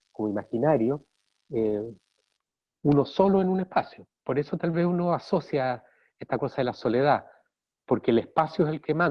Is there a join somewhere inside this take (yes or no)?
no